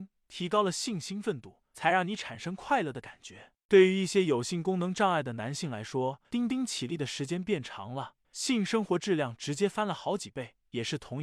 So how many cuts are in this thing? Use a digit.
2